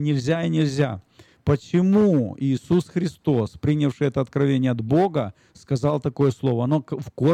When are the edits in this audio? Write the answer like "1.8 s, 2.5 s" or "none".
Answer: none